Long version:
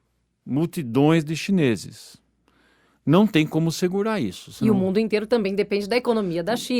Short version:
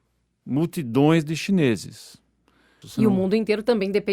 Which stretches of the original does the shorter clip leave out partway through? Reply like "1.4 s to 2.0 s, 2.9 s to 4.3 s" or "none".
2.8 s to 4.5 s